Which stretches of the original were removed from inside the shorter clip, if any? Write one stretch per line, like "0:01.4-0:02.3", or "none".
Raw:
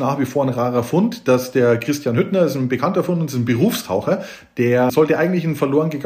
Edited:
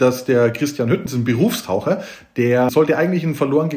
0:02.3-0:03.3